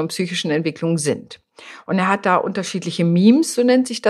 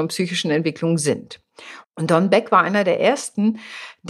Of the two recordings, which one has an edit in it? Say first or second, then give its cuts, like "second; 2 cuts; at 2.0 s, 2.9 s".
second; 1 cut; at 1.8 s